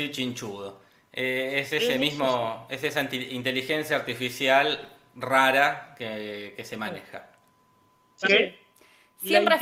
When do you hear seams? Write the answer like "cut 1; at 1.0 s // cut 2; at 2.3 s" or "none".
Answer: cut 1; at 8.2 s